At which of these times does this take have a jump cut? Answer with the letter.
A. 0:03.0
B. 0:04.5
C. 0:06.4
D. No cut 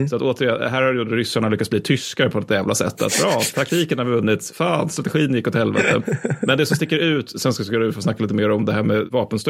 D